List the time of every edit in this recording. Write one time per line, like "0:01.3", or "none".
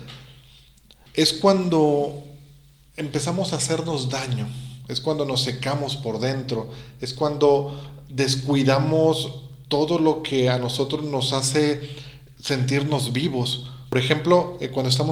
none

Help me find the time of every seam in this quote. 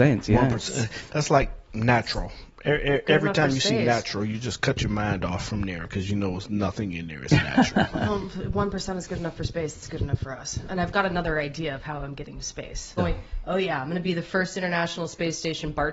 0:13.0

